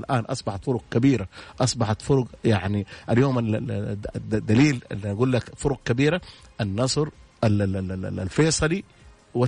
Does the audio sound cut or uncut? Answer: uncut